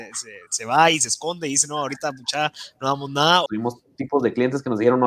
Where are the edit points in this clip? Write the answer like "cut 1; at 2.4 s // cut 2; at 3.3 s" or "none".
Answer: cut 1; at 3.5 s